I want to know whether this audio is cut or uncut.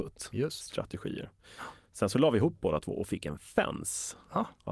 uncut